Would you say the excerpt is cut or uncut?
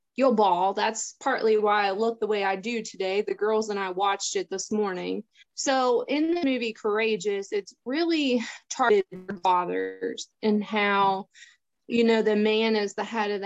cut